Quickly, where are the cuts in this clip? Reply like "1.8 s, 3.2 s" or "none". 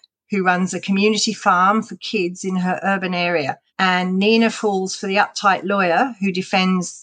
3.7 s

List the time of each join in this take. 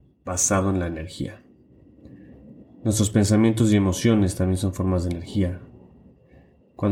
2.6 s

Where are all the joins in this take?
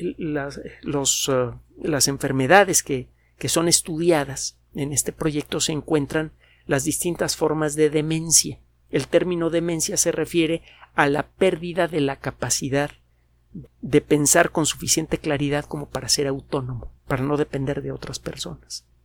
13.7 s, 17.0 s

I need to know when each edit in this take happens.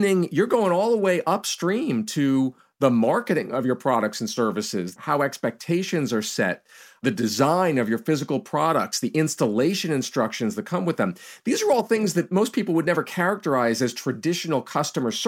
5.0 s

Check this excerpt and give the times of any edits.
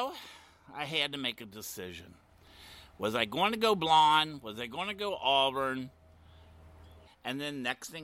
7.0 s

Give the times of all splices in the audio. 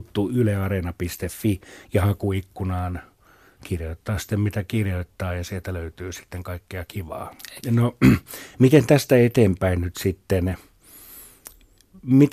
7.6 s

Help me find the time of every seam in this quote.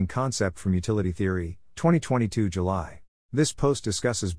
3.1 s

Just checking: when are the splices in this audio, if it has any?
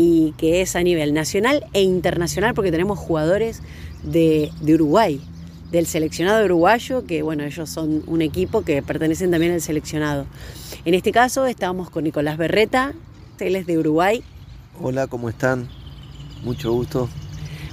13.4 s

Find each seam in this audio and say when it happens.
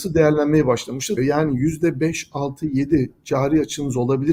1.2 s

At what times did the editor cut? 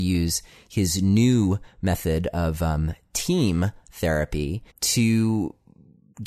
4.7 s

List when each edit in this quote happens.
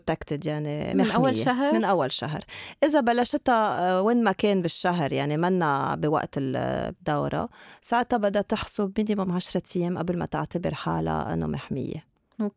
0.9 s

